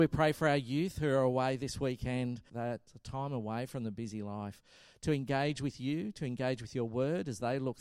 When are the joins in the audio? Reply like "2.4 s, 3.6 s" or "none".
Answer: 2.5 s